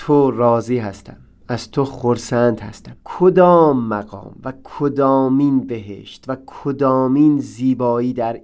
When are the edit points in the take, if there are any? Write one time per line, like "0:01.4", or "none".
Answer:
0:03.0